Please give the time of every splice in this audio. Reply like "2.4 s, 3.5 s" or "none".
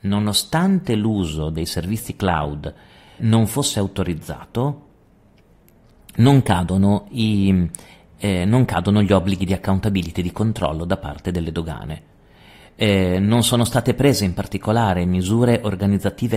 3.2 s